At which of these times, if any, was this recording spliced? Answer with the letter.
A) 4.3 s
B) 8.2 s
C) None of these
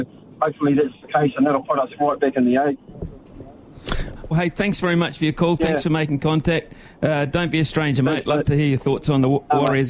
A